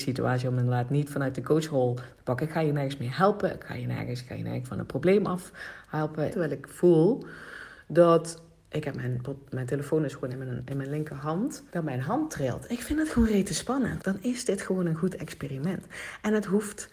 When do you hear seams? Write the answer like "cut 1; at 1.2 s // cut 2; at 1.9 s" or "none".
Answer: cut 1; at 6.3 s // cut 2; at 11.7 s // cut 3; at 14.0 s